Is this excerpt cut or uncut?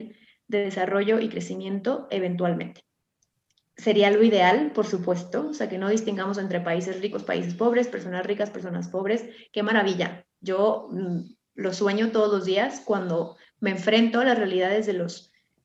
uncut